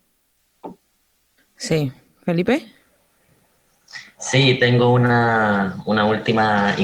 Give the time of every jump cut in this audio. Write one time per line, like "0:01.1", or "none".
none